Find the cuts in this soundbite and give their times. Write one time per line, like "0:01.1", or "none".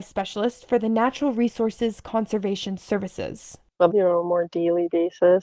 0:03.9